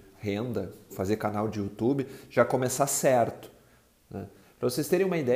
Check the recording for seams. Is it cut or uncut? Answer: cut